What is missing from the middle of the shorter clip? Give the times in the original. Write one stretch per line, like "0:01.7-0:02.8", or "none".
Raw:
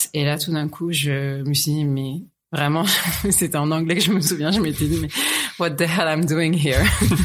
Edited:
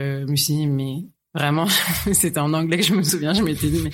none